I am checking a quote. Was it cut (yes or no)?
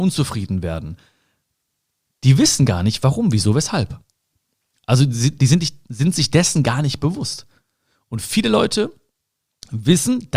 no